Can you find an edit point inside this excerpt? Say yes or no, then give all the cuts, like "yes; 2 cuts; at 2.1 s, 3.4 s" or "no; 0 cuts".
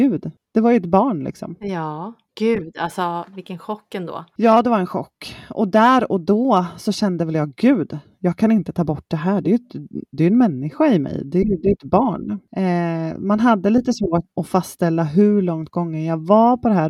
no; 0 cuts